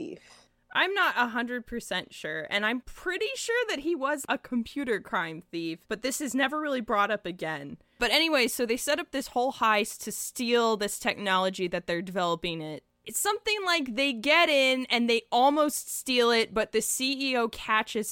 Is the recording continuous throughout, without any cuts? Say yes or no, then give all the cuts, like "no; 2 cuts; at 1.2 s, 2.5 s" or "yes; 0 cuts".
no; 1 cut; at 5.8 s